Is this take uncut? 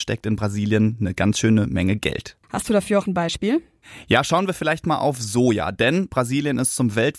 no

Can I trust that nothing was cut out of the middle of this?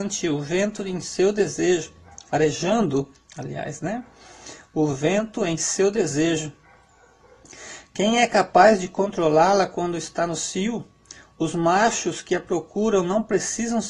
yes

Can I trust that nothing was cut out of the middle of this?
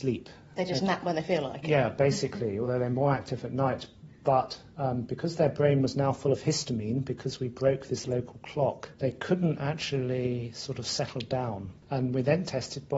yes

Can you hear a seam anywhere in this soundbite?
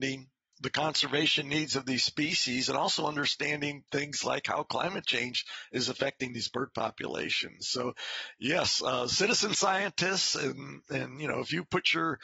no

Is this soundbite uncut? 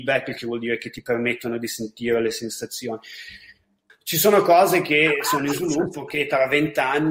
no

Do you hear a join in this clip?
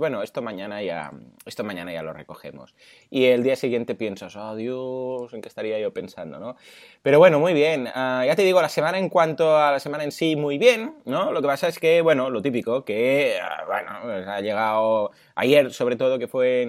no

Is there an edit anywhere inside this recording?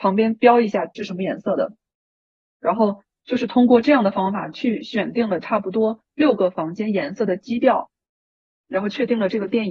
yes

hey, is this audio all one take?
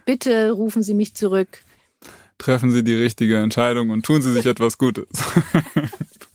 yes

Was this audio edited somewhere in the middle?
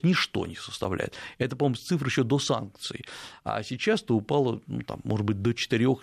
no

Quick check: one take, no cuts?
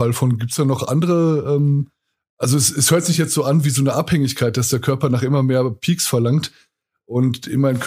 yes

